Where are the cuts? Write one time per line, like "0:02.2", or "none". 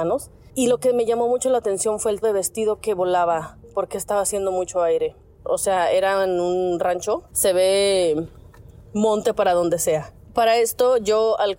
0:02.2
0:05.4